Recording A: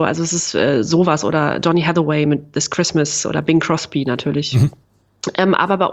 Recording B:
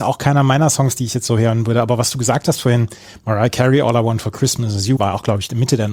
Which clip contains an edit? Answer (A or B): B